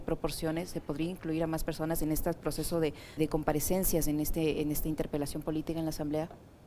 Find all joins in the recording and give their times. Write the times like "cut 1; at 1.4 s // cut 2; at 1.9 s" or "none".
cut 1; at 3.2 s